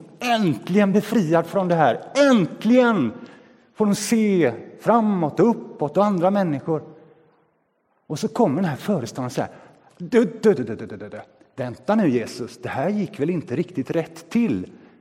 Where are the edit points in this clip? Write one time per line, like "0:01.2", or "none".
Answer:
0:10.5